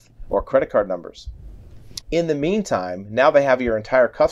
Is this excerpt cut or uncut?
cut